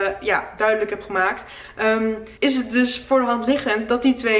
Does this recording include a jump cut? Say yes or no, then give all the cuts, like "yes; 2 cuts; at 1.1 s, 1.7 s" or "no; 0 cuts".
yes; 1 cut; at 2.4 s